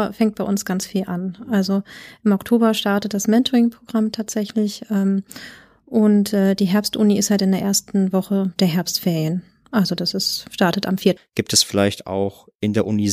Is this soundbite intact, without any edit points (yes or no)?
no